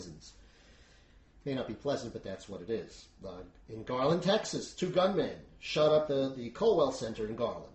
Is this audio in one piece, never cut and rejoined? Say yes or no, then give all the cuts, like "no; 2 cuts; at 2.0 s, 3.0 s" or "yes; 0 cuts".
yes; 0 cuts